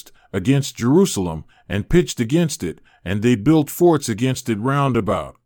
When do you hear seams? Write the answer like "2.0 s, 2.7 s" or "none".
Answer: none